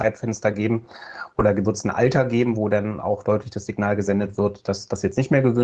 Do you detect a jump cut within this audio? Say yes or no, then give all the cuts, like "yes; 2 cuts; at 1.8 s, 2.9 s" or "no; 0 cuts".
no; 0 cuts